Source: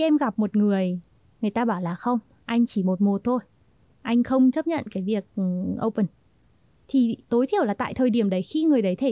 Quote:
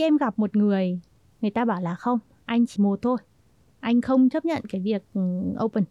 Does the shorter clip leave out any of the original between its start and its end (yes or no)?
yes